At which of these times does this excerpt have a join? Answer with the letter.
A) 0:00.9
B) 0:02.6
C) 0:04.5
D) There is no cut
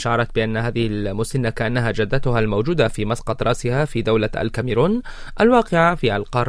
D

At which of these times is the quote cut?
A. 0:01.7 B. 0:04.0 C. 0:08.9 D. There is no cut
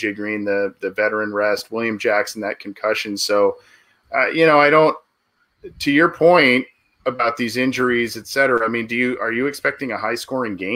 B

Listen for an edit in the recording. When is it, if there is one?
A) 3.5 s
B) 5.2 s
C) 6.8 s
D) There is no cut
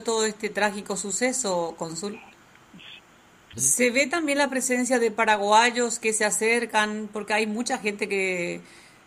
A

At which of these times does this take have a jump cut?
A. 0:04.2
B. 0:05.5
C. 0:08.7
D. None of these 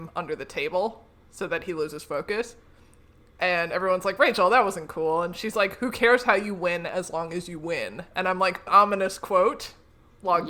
C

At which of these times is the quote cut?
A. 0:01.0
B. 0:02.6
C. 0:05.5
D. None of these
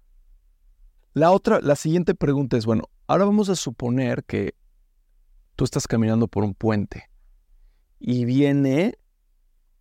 A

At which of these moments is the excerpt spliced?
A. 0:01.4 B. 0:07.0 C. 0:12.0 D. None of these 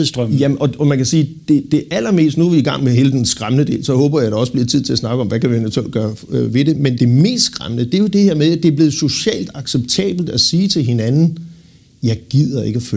B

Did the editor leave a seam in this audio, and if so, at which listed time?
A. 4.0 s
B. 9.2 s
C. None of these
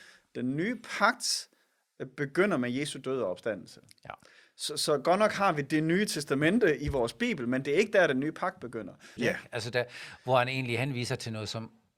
B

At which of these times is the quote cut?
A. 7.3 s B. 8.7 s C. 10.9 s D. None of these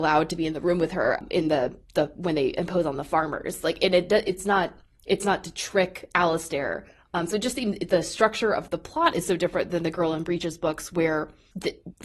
B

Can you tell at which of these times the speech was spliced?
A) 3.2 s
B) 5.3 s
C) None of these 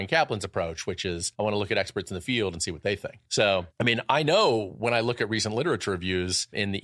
C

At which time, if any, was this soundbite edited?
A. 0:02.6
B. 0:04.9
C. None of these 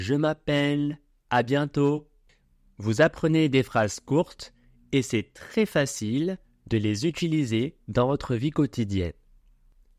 C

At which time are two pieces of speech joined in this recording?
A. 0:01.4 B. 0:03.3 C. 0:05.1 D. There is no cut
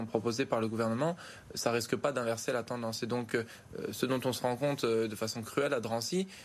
D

